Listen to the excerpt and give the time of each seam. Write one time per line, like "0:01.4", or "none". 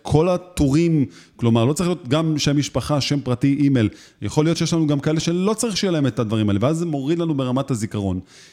0:02.4